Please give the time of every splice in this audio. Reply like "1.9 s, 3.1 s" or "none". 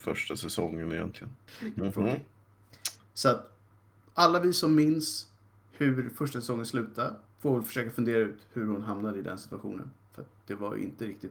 1.7 s